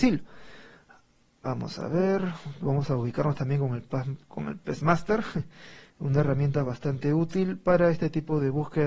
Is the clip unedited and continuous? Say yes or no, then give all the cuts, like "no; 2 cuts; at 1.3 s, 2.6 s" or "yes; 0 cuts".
yes; 0 cuts